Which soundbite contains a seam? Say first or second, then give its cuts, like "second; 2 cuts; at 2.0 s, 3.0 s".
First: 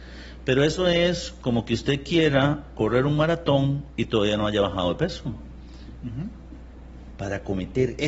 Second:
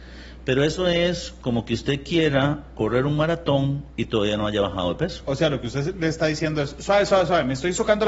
first; 2 cuts; at 5.2 s, 7.1 s